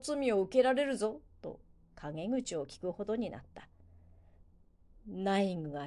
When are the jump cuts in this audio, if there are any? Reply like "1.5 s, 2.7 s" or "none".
4.9 s